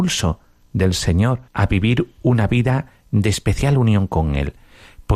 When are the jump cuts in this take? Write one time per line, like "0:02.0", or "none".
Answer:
0:01.5